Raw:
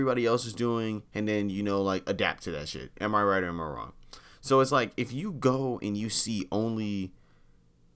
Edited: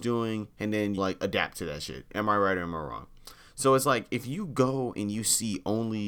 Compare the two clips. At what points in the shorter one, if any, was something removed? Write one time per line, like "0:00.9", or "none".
0:01.0